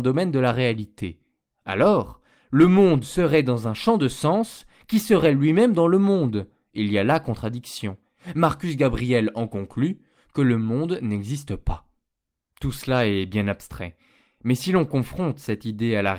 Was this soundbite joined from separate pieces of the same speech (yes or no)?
no